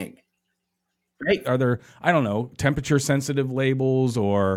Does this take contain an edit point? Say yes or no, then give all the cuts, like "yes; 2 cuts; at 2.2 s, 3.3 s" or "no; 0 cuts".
yes; 1 cut; at 1.4 s